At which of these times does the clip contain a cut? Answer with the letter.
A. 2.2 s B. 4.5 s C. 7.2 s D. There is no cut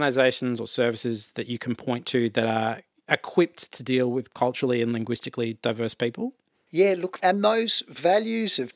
C